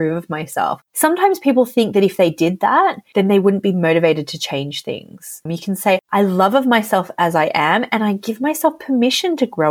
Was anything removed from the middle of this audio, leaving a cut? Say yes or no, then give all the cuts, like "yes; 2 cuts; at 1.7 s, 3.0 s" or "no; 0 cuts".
yes; 1 cut; at 5.5 s